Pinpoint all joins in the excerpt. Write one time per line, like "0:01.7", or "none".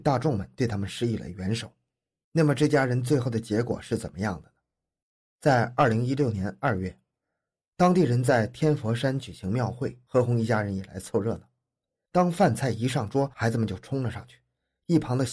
none